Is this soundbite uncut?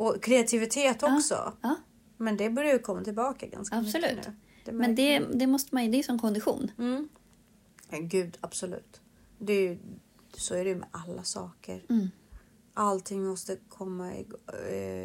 yes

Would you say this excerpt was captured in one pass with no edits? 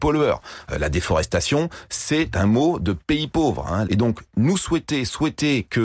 no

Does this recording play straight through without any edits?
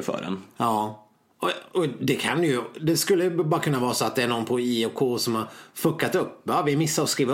yes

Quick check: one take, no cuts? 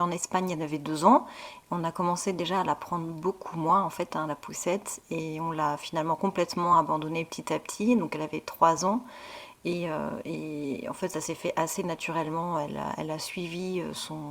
yes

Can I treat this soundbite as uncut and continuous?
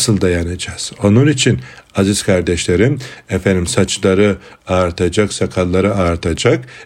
yes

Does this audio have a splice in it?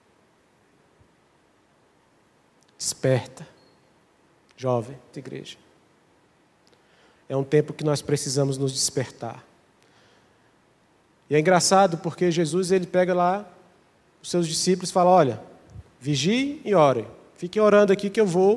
yes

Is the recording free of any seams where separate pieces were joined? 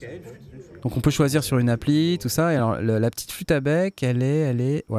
yes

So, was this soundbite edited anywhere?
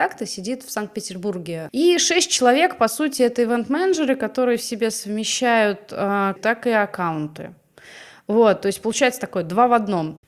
yes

